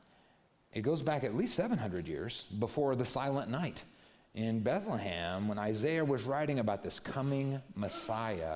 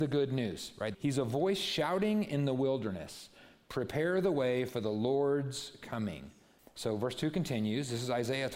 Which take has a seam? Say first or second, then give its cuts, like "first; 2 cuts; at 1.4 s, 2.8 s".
second; 2 cuts; at 0.9 s, 6.6 s